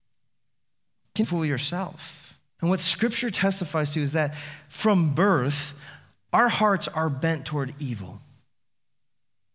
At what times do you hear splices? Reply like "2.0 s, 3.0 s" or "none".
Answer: 1.2 s, 2.6 s